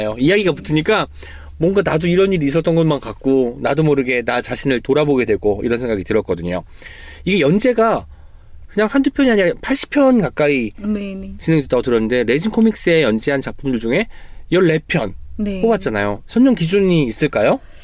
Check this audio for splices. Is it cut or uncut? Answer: uncut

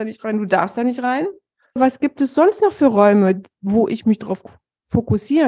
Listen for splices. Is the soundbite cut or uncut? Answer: cut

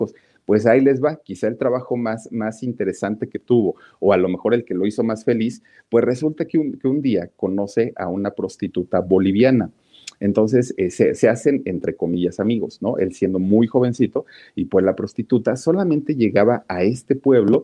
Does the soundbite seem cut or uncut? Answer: uncut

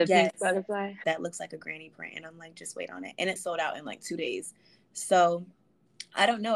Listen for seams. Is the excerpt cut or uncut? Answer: cut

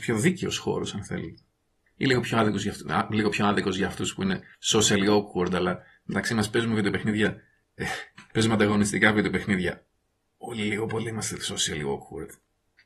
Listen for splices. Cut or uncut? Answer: uncut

